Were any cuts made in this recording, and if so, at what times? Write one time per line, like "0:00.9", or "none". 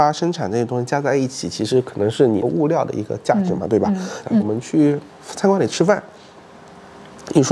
0:04.2